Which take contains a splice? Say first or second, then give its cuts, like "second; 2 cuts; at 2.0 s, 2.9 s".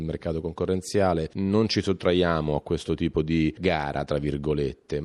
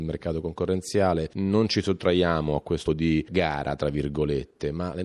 second; 1 cut; at 2.9 s